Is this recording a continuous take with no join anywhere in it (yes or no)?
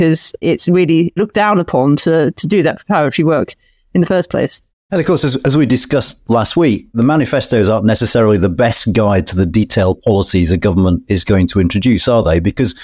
yes